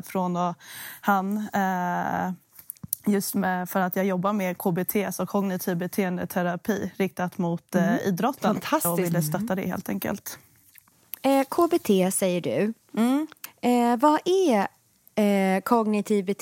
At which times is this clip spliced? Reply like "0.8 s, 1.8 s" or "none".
none